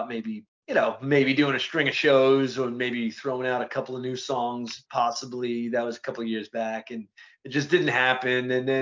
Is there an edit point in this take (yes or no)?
no